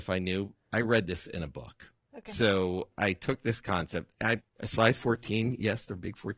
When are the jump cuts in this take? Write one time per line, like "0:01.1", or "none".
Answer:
0:04.4